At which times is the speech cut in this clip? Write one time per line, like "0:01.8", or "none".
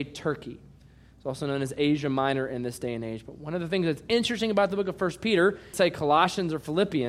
0:05.7